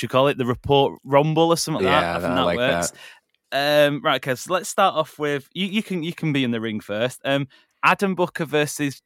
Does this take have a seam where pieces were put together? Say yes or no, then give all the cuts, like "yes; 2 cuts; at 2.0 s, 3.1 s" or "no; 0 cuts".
yes; 1 cut; at 1.8 s